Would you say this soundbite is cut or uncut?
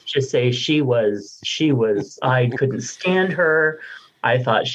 cut